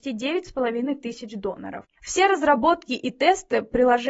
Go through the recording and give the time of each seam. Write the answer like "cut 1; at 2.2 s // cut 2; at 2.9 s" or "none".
cut 1; at 2.0 s